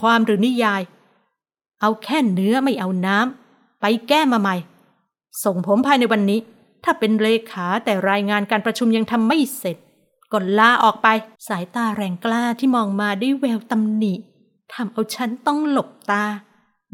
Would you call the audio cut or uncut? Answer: cut